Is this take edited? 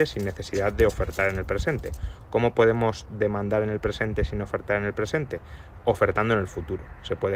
no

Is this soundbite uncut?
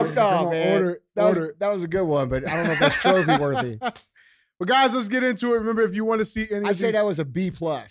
yes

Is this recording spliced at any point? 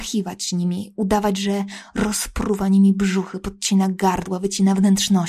no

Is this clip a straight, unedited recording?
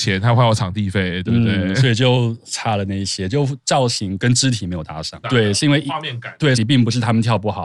no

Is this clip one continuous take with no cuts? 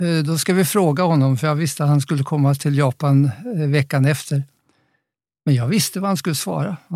yes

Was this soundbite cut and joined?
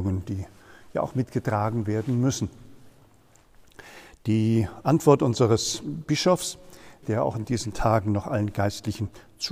yes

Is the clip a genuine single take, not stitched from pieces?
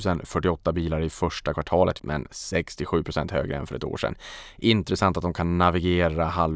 no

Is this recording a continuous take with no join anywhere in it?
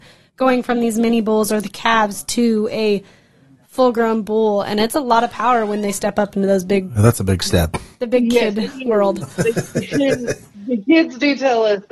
yes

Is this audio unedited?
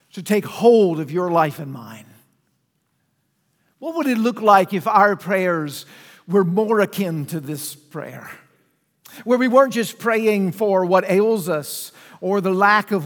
yes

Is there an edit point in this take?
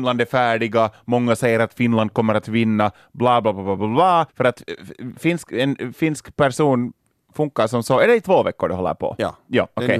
yes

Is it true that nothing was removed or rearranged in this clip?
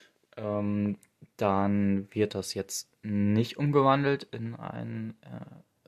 yes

